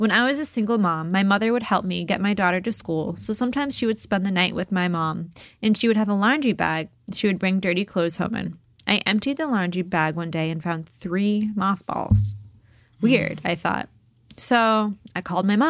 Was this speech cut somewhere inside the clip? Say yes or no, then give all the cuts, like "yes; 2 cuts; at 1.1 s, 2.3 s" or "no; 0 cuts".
no; 0 cuts